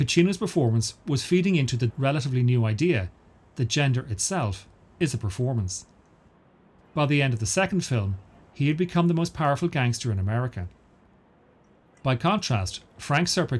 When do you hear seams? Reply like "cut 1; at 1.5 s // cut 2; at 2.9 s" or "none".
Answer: cut 1; at 1.9 s // cut 2; at 6.8 s